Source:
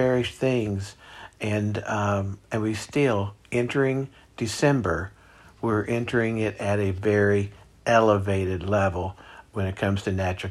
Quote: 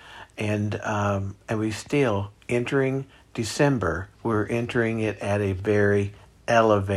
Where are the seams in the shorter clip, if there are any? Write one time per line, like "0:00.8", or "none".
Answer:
0:04.1